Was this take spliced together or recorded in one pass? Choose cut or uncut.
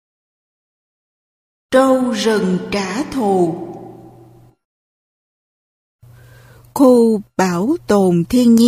uncut